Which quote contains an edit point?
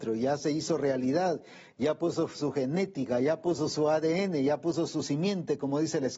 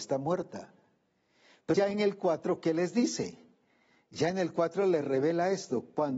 second; 1 cut; at 1.7 s

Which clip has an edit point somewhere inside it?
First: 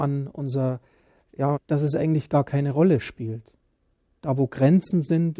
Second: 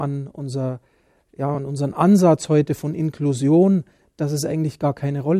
first; 1 cut; at 1.5 s

